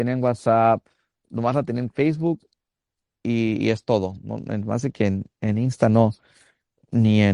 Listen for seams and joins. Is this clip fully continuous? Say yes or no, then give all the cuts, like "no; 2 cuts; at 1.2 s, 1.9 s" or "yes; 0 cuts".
yes; 0 cuts